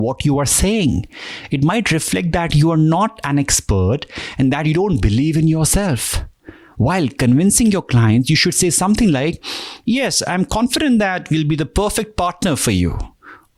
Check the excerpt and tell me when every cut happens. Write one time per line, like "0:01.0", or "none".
none

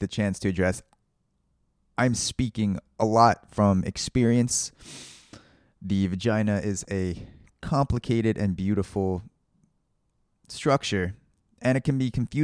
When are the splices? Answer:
0:05.8

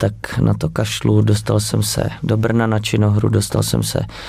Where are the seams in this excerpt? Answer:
none

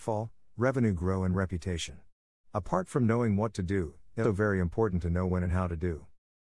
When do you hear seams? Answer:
0:02.3
0:04.2

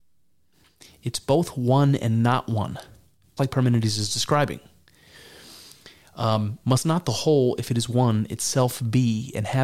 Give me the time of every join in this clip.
0:03.4
0:06.6

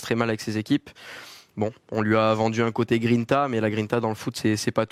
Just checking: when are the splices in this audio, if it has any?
none

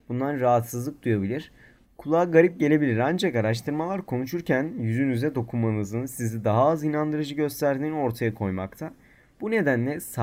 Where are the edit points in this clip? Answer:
0:01.8

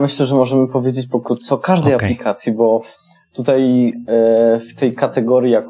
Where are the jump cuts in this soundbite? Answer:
none

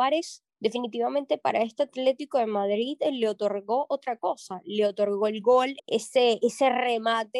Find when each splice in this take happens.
0:05.8

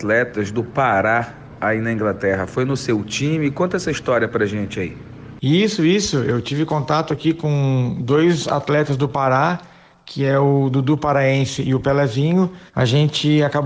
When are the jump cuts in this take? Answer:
0:12.7

